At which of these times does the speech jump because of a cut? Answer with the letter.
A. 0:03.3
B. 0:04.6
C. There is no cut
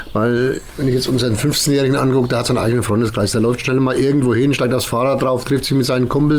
C